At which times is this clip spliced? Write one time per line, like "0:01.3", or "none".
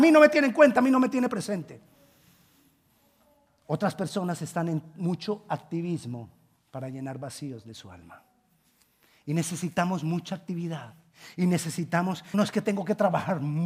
0:12.3